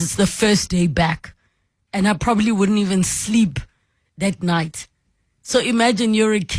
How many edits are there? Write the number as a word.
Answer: zero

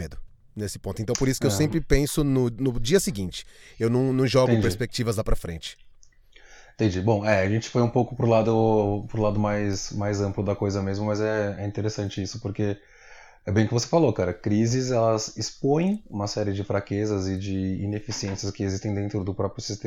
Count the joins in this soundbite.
zero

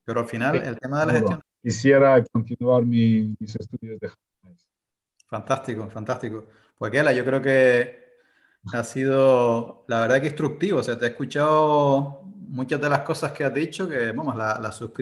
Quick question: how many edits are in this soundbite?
one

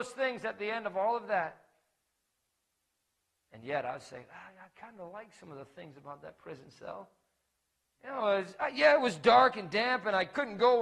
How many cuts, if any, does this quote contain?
zero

